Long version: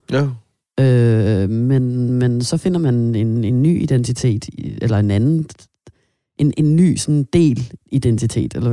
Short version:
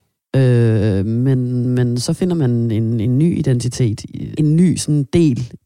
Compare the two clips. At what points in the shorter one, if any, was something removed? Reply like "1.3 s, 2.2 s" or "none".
4.4 s